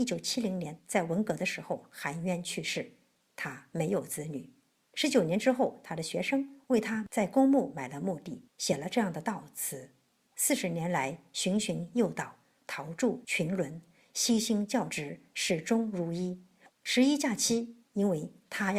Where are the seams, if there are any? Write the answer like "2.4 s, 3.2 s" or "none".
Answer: 16.7 s, 17.8 s